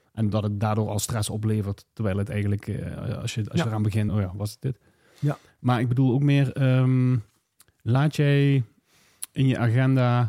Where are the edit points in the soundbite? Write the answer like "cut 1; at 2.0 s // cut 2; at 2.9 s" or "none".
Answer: cut 1; at 4.1 s